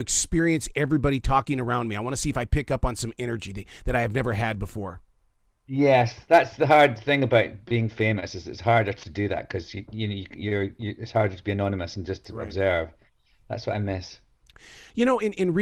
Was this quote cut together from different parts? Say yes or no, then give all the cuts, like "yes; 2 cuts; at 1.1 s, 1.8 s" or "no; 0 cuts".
no; 0 cuts